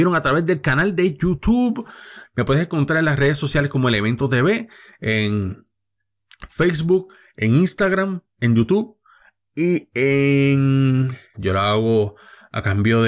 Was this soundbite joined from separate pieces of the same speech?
yes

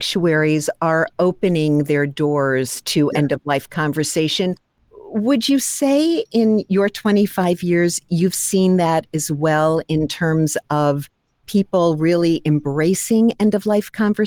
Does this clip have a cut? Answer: no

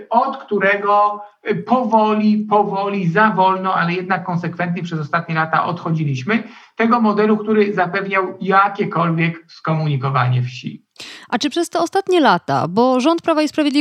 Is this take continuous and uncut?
yes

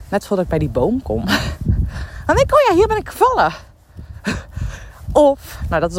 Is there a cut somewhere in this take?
no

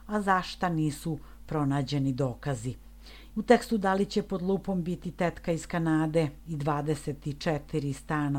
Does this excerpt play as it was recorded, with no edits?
no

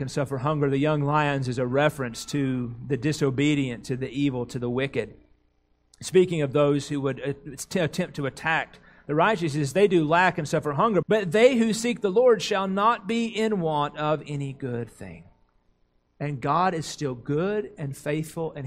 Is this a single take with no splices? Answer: no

